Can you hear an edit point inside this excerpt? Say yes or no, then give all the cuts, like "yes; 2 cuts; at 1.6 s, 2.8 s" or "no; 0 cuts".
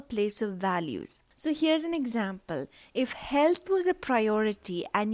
yes; 1 cut; at 1.3 s